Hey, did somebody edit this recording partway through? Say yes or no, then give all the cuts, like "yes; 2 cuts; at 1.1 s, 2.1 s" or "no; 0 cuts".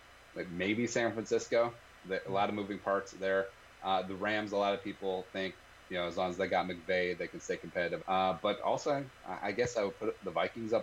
yes; 1 cut; at 8.0 s